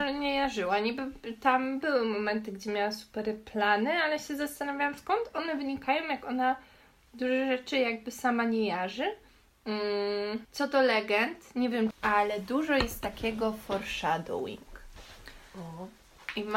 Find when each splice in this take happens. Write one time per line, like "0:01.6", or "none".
0:10.4
0:11.9